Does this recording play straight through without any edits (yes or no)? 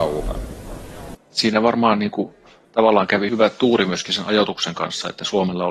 no